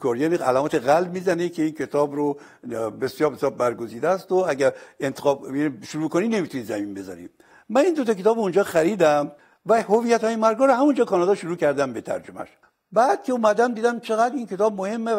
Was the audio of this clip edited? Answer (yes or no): no